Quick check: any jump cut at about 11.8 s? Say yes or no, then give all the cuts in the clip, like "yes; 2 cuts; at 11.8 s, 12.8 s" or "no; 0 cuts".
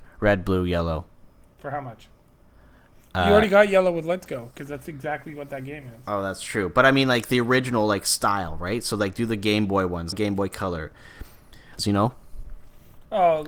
yes; 2 cuts; at 10.1 s, 11.8 s